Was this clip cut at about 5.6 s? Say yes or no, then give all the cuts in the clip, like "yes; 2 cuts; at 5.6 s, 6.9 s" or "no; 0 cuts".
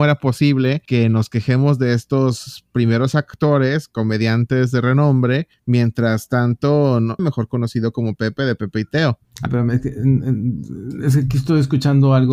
no; 2 cuts; at 7.2 s, 9.5 s